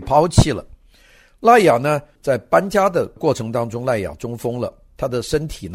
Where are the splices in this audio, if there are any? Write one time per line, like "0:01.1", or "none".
0:02.2

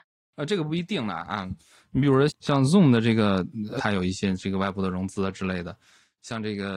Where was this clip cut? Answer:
0:02.3
0:03.8

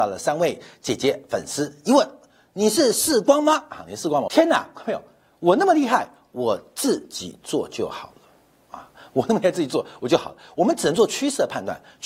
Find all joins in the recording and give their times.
0:04.3

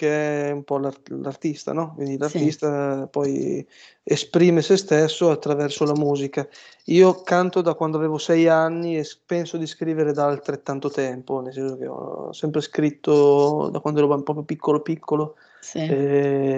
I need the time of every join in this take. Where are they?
none

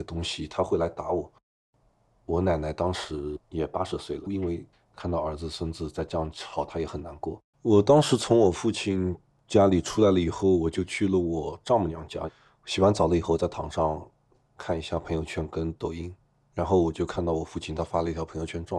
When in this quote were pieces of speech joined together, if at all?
0:04.3
0:07.5

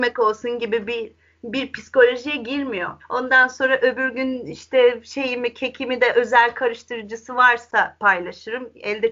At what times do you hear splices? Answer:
0:03.0

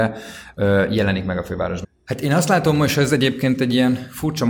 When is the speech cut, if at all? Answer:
0:01.8

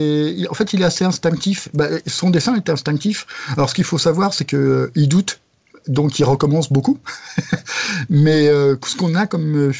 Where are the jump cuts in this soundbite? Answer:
none

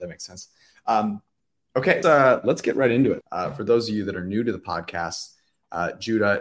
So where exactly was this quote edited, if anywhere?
0:02.0
0:03.2

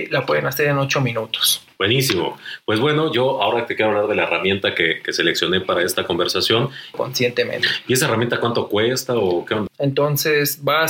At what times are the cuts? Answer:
0:01.8
0:06.9
0:09.7

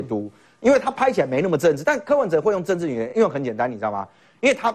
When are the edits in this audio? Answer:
none

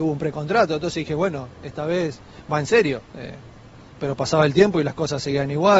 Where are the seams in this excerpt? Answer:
0:03.1

